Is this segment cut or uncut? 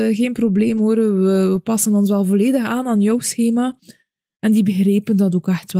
uncut